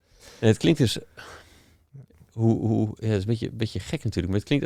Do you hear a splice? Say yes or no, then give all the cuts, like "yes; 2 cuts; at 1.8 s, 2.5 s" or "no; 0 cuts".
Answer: no; 0 cuts